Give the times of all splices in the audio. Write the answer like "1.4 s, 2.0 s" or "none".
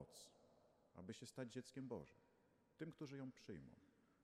none